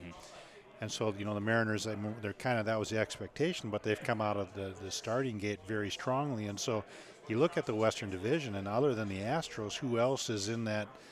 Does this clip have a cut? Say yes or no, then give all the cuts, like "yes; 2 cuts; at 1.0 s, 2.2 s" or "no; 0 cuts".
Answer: yes; 1 cut; at 4.5 s